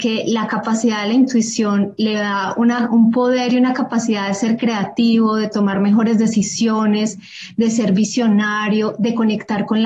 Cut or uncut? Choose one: uncut